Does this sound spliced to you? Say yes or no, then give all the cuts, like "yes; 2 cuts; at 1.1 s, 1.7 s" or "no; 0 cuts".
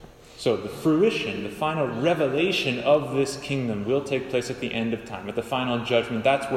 no; 0 cuts